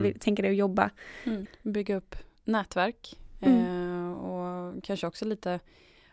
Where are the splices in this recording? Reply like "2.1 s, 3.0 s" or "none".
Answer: 1.5 s